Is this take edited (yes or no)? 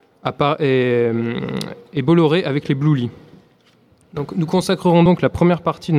no